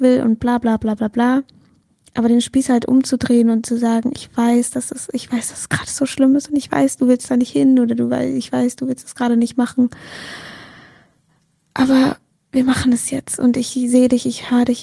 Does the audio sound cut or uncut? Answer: uncut